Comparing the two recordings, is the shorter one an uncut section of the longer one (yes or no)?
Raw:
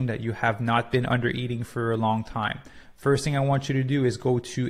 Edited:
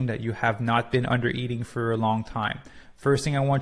yes